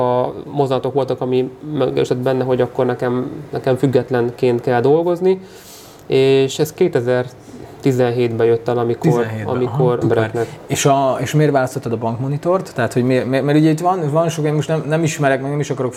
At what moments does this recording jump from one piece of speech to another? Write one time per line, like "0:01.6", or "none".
0:10.0